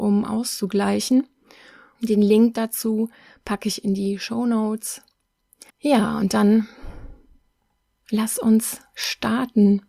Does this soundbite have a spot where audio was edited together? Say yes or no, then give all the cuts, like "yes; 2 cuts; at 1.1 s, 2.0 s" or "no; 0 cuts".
yes; 2 cuts; at 2.0 s, 5.7 s